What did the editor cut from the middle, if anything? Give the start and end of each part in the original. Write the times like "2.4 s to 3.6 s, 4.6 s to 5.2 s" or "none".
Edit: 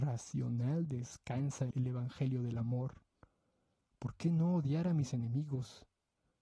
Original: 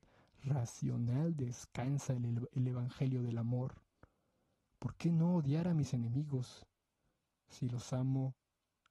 2.2 s to 2.5 s